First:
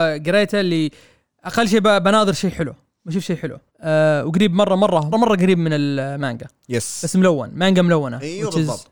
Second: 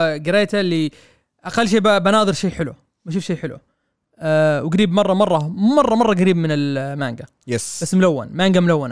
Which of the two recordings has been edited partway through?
first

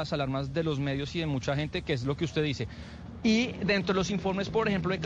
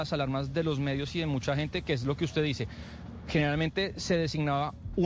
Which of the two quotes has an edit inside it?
first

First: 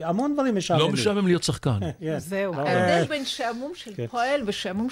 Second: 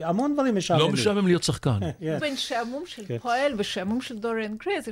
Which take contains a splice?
second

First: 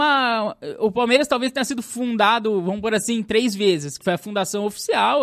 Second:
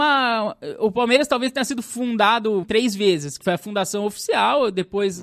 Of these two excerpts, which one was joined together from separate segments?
second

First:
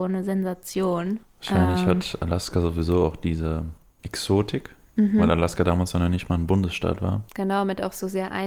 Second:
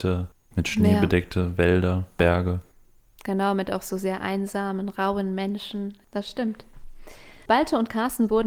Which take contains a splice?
first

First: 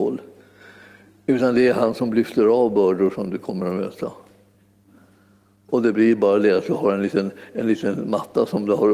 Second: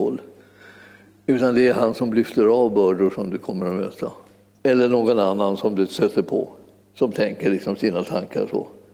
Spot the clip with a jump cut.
second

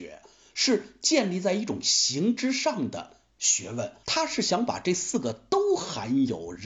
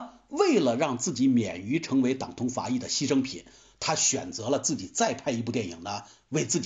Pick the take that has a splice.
first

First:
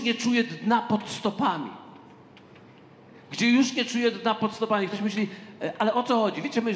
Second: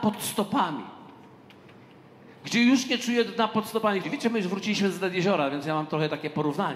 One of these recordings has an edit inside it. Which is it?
second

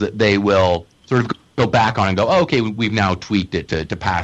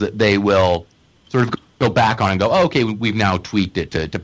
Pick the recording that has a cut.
first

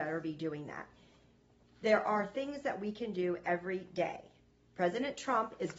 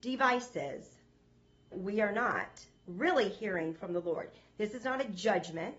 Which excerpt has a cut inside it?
second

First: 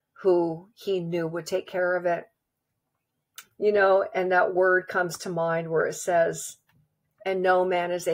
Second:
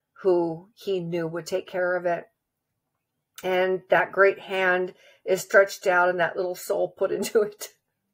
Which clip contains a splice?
first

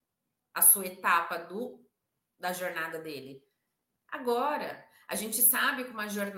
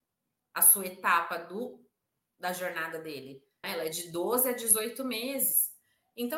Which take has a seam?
second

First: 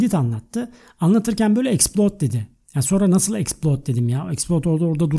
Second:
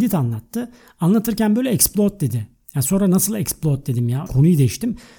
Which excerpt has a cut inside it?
second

